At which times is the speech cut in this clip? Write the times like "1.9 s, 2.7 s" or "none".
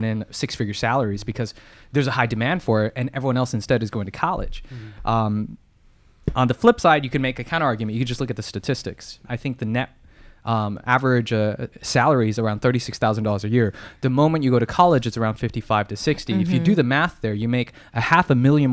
9.3 s